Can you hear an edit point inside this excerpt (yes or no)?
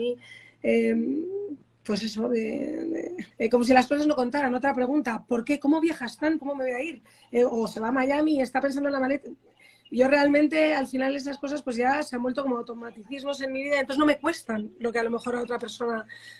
yes